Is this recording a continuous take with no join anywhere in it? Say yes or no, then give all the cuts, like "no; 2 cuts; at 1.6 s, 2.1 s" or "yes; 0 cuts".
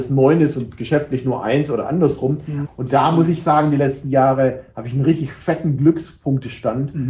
no; 1 cut; at 2.6 s